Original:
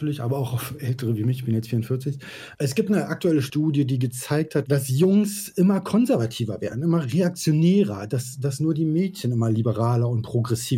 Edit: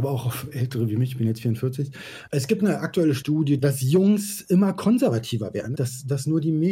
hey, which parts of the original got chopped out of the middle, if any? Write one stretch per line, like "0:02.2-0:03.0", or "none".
0:03.9-0:04.7
0:06.8-0:08.1